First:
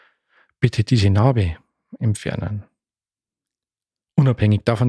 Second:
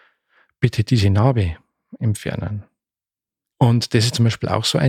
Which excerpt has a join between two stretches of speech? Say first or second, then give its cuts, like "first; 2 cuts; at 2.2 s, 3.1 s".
second; 1 cut; at 3.5 s